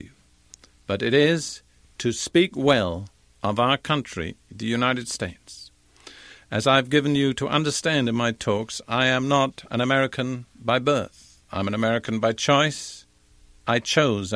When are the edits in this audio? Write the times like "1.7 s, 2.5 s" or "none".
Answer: none